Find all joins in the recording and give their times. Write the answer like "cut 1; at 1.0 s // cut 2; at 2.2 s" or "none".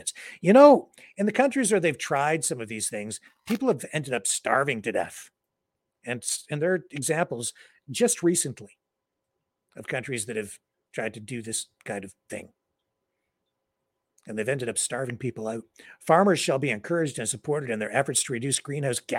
none

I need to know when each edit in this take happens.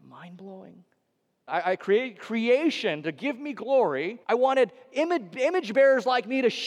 cut 1; at 1.5 s // cut 2; at 4.2 s

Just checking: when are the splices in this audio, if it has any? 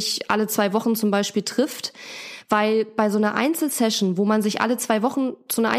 none

